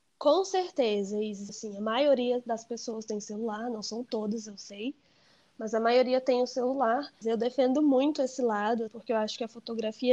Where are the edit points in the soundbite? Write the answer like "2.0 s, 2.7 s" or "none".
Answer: 1.5 s, 7.2 s, 8.9 s